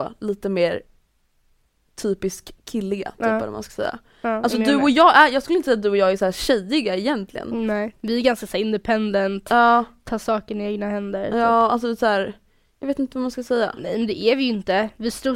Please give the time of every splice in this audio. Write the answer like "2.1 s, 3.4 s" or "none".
12.8 s